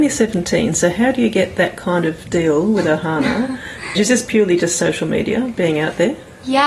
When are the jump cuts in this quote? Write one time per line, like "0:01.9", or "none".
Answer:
0:04.0

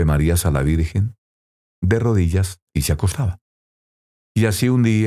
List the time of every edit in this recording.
0:02.7

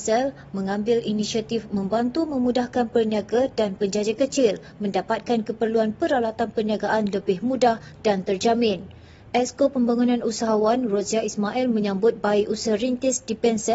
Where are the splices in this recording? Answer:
none

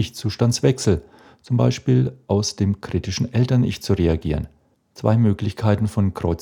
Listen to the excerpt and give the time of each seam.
0:04.7

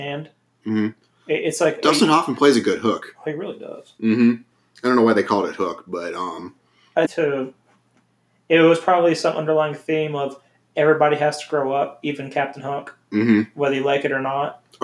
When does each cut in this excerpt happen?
0:07.0

